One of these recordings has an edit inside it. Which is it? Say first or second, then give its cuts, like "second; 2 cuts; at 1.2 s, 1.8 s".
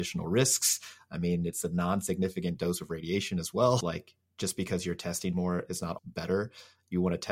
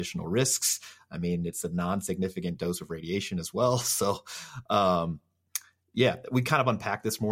first; 2 cuts; at 3.8 s, 6.0 s